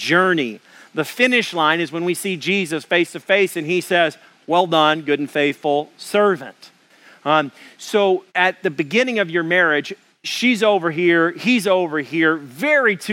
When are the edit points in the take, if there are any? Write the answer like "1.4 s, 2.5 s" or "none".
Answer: 8.3 s